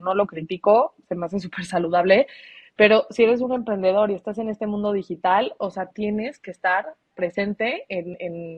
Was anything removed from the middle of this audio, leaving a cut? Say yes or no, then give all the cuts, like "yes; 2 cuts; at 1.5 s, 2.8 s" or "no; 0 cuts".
no; 0 cuts